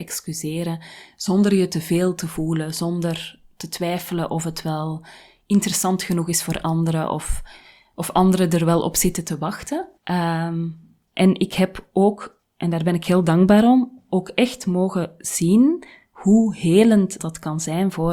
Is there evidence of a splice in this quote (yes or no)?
yes